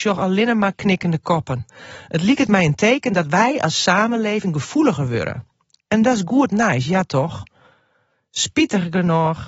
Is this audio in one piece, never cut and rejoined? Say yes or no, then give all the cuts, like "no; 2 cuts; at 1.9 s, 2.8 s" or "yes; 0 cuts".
yes; 0 cuts